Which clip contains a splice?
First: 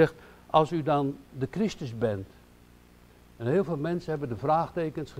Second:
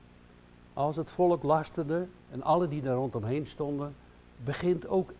second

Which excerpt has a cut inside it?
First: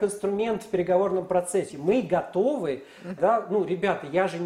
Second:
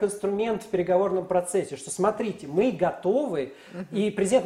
first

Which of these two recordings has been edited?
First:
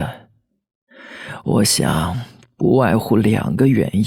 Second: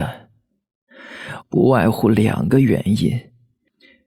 second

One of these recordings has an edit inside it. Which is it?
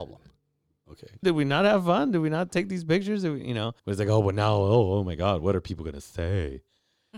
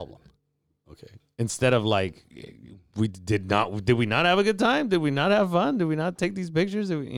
first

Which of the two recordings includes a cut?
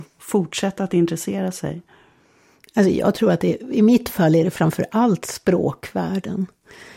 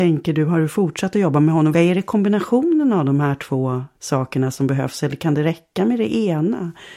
second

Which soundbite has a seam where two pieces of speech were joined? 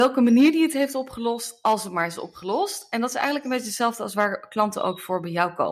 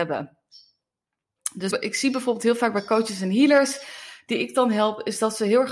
second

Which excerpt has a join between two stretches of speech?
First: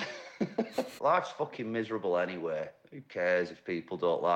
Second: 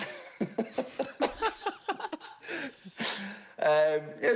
first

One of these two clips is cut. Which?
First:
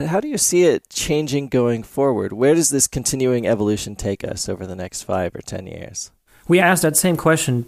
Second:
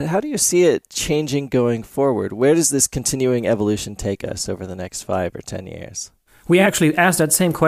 first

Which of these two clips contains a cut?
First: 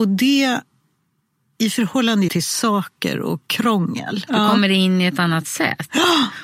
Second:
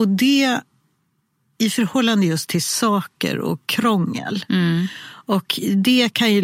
first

